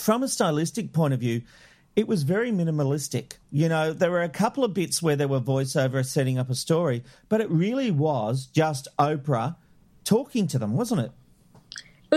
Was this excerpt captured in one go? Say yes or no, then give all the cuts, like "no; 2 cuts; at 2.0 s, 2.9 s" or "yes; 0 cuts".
no; 1 cut; at 3.4 s